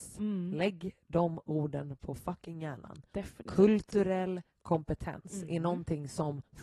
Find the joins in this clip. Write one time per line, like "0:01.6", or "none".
none